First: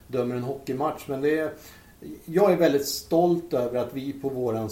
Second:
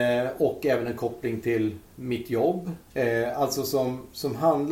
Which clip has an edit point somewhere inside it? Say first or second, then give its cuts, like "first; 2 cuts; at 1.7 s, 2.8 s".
second; 1 cut; at 2.9 s